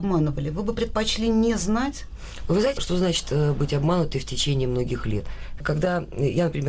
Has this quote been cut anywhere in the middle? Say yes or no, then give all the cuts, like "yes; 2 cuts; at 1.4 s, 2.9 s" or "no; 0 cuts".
yes; 2 cuts; at 2.8 s, 5.6 s